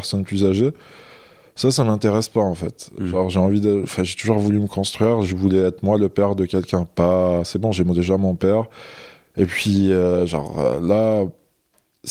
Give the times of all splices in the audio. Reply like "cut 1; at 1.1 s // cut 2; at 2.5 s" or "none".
none